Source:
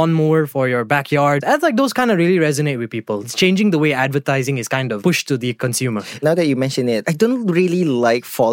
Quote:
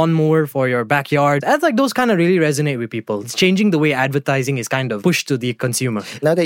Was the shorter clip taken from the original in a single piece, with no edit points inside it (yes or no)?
yes